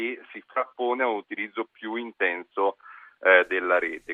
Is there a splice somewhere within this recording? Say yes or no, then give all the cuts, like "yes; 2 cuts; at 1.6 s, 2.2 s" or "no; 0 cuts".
no; 0 cuts